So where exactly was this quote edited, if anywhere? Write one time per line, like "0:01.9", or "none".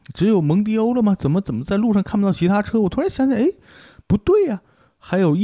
none